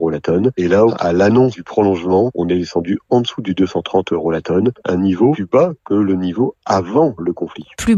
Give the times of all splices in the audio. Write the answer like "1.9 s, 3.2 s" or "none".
none